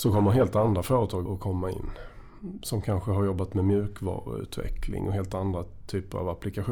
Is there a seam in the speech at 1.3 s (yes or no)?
yes